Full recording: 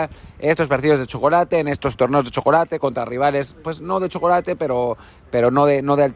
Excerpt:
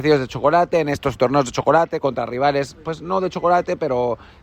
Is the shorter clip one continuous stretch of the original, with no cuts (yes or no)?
yes